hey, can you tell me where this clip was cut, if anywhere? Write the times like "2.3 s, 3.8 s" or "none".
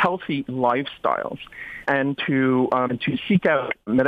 2.9 s